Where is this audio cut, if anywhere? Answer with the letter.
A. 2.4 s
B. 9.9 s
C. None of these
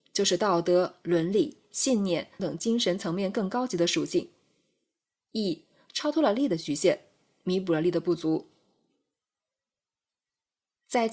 A